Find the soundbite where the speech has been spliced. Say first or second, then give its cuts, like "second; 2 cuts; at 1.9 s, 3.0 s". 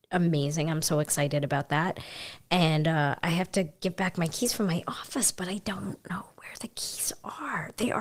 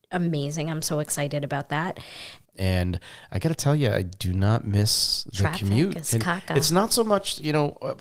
second; 1 cut; at 2.4 s